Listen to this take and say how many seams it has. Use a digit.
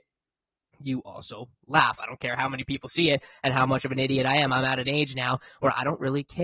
0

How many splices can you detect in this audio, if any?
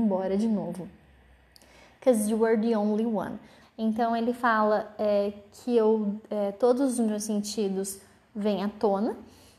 1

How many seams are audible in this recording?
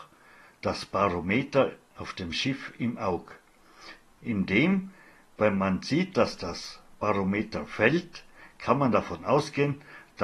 1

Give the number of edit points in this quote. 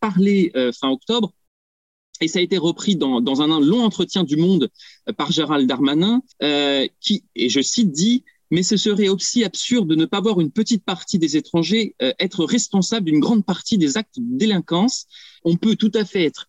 2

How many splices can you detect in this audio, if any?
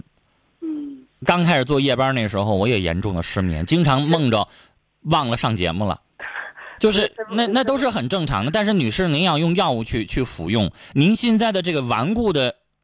0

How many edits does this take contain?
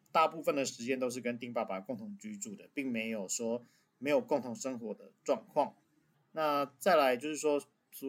1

